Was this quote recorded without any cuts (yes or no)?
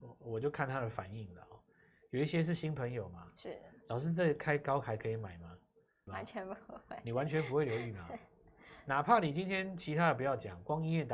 no